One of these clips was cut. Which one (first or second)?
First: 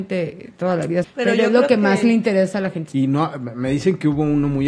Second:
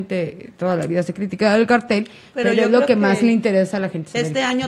first